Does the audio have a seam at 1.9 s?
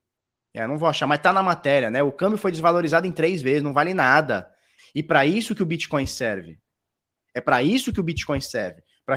no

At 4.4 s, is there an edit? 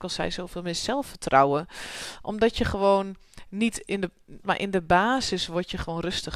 yes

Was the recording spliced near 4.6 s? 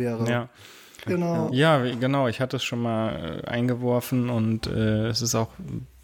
no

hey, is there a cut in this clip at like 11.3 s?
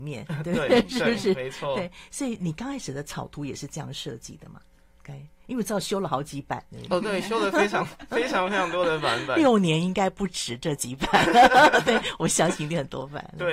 no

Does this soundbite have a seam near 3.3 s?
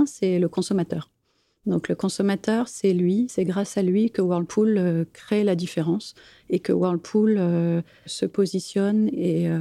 yes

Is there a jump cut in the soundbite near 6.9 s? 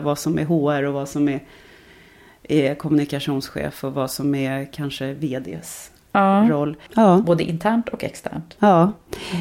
yes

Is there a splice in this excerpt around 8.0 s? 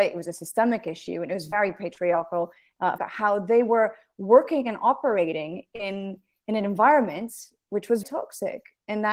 yes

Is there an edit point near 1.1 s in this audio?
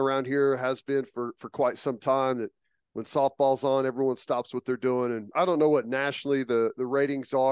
no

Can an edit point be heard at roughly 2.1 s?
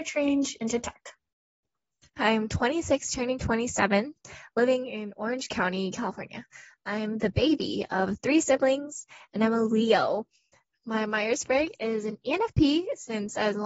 yes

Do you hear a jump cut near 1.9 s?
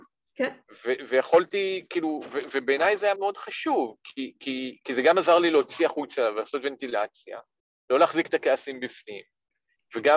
no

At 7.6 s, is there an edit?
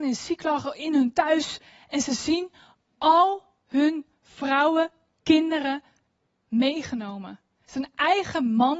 yes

